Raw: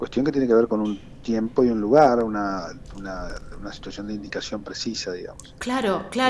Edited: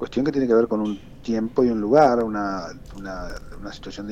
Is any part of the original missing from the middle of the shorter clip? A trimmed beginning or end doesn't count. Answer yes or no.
no